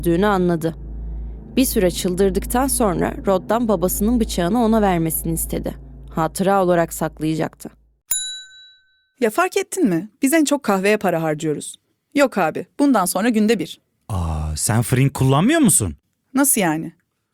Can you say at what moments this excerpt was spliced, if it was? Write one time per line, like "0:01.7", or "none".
none